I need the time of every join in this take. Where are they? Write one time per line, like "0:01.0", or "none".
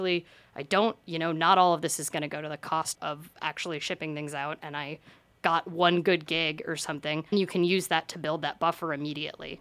0:02.9
0:07.3

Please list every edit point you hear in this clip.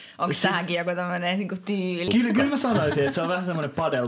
0:02.1

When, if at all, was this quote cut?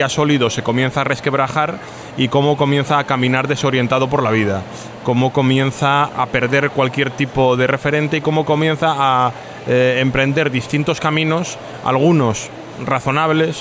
none

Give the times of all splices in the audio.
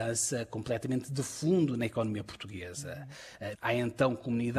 0:03.5

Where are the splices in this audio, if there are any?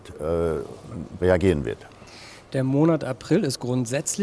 0:01.2

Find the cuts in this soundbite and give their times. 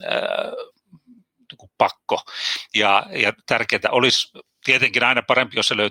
none

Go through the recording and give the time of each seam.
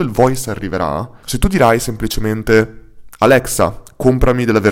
0:01.2

